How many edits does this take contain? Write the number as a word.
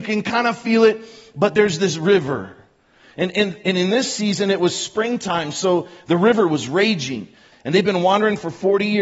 one